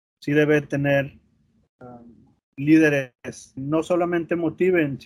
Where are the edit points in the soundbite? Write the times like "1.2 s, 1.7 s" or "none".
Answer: 2.4 s, 3.6 s